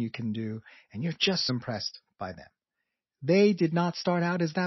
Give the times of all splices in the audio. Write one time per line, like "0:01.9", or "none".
0:01.5